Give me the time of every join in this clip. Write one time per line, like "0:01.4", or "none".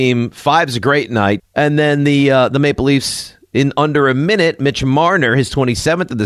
0:01.4